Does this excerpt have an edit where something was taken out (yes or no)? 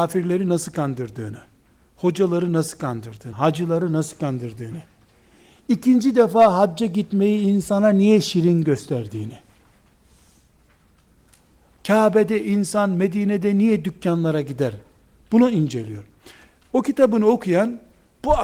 yes